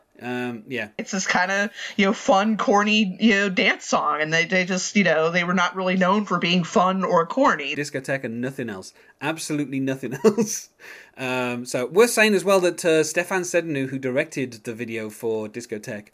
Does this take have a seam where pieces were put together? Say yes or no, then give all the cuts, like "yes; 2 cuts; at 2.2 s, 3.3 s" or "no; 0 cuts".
yes; 2 cuts; at 1.0 s, 7.7 s